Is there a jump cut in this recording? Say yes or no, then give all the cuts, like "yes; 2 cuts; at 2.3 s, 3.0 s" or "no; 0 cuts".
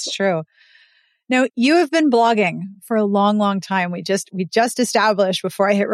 no; 0 cuts